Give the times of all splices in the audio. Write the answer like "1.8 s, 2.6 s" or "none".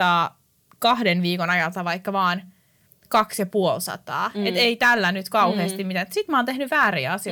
none